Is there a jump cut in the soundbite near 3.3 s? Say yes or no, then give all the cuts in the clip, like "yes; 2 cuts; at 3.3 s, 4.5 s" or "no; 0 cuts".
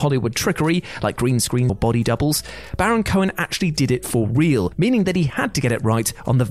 no; 1 cut; at 1.7 s